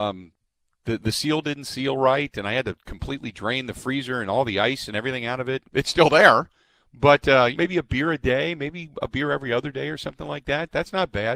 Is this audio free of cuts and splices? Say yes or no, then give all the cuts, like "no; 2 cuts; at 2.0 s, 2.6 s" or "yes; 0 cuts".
no; 2 cuts; at 5.6 s, 7.5 s